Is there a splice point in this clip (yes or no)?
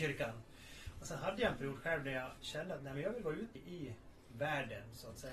yes